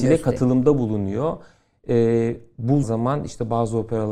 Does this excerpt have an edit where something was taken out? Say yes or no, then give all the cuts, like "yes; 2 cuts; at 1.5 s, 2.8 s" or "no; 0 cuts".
yes; 1 cut; at 2.8 s